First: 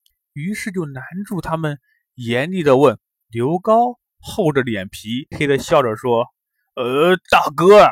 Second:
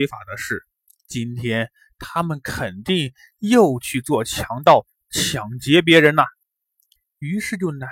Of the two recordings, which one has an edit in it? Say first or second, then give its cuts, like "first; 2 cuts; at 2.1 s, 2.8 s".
first; 2 cuts; at 3.1 s, 5.3 s